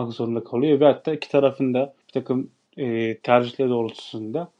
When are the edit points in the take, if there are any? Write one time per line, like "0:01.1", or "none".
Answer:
0:02.0